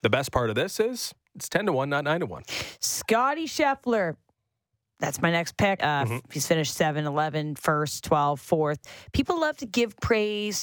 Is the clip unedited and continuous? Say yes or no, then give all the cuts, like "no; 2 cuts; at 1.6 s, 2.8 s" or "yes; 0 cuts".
no; 1 cut; at 5.8 s